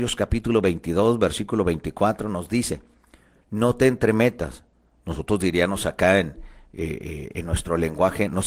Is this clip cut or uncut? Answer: uncut